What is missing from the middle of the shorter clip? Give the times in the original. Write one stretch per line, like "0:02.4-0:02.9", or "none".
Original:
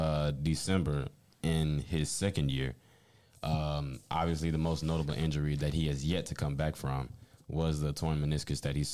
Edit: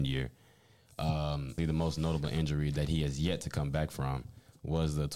0:04.0-0:04.4